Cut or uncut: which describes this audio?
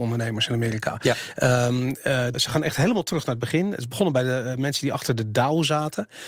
cut